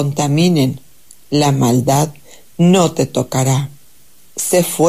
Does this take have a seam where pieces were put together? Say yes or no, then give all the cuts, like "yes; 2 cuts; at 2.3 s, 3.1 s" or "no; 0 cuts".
no; 0 cuts